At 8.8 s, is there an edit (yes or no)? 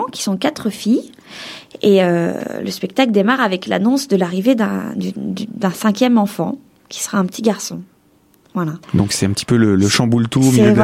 yes